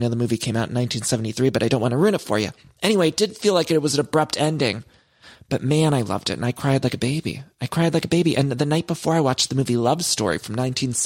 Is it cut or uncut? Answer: uncut